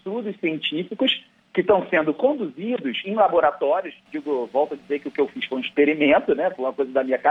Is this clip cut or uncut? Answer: uncut